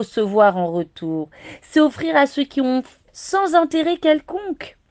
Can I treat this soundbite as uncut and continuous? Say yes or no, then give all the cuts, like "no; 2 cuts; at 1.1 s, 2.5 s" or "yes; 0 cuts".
no; 1 cut; at 3.1 s